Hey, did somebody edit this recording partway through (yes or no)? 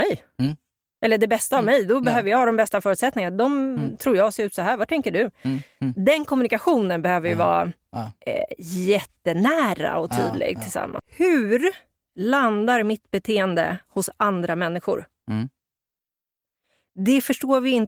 yes